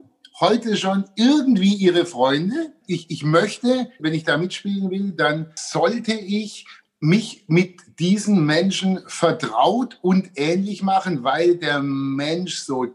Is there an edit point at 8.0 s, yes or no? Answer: no